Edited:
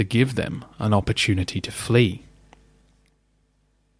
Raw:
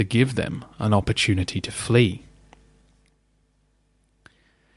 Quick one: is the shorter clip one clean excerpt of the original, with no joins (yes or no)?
yes